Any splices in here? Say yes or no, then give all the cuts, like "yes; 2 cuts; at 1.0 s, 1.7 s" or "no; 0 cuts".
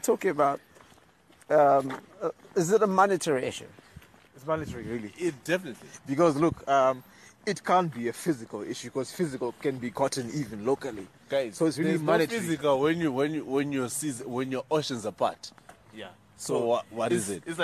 no; 0 cuts